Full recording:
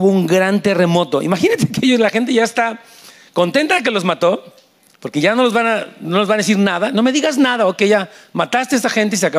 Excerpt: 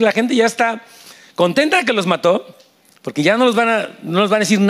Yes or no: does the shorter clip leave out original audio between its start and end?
no